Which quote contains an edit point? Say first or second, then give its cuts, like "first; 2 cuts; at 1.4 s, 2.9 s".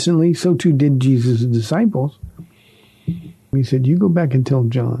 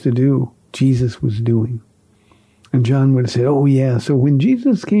first; 1 cut; at 3.5 s